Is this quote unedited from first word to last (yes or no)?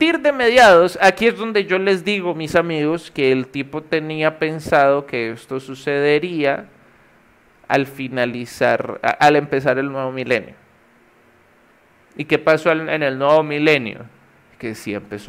yes